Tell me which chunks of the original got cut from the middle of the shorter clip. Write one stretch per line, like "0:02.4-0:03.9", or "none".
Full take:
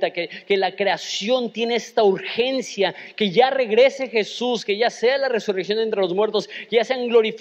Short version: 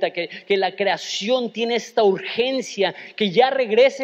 none